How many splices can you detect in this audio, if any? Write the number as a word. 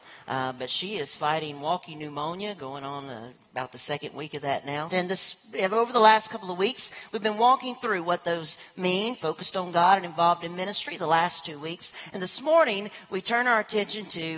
one